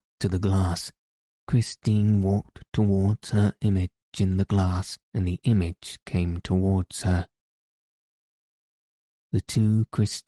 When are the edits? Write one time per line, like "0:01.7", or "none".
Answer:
0:01.3
0:05.0